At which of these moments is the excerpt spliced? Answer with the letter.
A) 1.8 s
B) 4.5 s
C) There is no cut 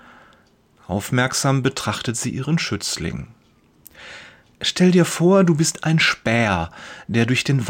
C